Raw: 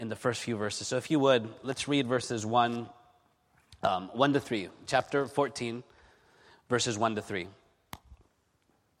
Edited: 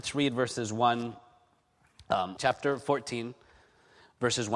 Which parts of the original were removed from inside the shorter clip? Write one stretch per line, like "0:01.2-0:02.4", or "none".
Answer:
0:04.1-0:04.9